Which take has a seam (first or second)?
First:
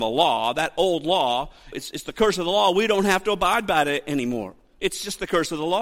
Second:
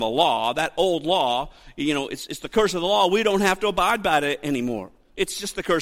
first